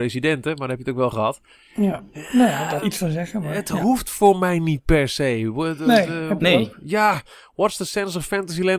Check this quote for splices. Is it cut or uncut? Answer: cut